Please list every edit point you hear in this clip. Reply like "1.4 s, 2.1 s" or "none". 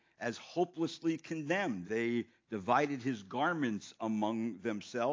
1.8 s

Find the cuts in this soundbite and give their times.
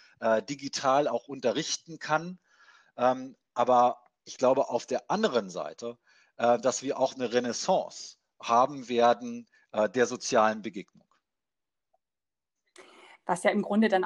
none

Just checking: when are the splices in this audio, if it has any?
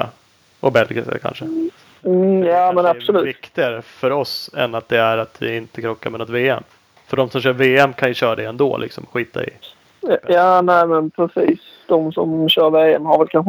none

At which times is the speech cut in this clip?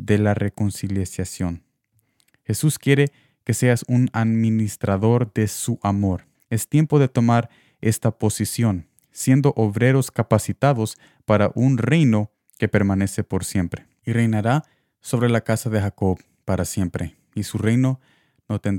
6.3 s, 14.0 s

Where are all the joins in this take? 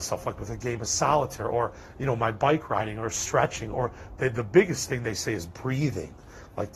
none

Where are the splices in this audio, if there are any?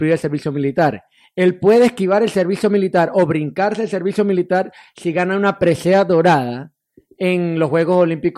none

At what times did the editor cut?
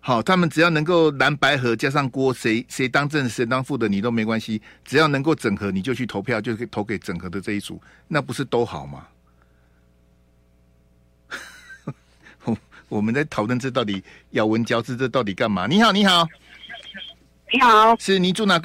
none

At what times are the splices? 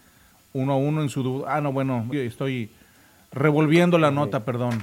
2.1 s

